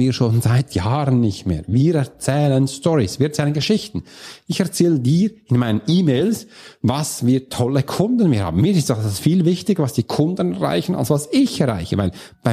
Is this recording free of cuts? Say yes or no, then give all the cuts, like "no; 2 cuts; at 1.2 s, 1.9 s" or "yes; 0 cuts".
yes; 0 cuts